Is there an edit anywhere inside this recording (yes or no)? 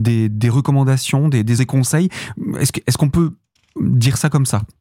yes